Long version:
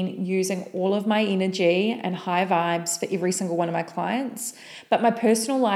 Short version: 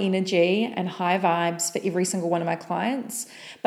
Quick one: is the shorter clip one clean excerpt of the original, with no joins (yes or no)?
yes